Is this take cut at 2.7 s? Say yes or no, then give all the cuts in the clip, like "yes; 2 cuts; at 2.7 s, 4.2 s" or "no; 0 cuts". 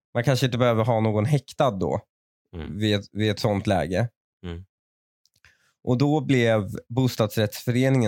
no; 2 cuts; at 4.2 s, 6.8 s